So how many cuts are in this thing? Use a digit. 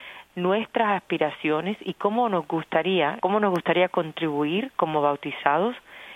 1